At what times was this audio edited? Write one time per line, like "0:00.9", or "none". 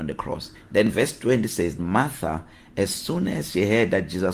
0:01.8